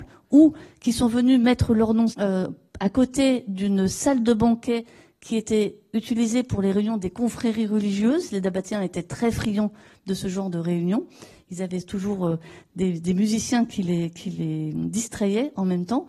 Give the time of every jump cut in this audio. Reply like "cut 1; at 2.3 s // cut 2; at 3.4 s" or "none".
cut 1; at 2.1 s

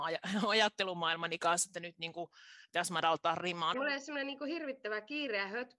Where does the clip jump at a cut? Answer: cut 1; at 3.7 s

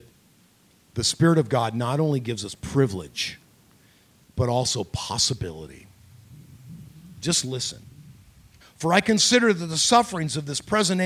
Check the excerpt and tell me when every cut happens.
cut 1; at 8.6 s

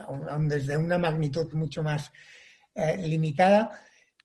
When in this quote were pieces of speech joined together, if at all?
cut 1; at 1.5 s

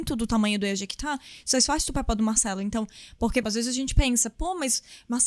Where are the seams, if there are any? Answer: cut 1; at 3.4 s

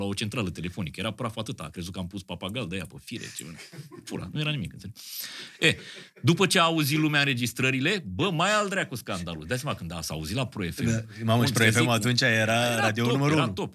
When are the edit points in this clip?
none

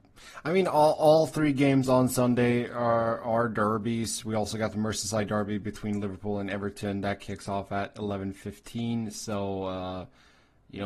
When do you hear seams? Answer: none

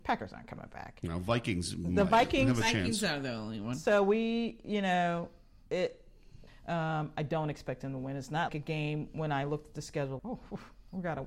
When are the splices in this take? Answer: cut 1; at 6.5 s // cut 2; at 8.5 s // cut 3; at 10.2 s

